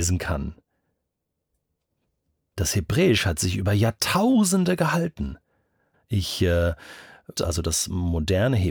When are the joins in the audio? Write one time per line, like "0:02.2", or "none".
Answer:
0:05.9
0:07.3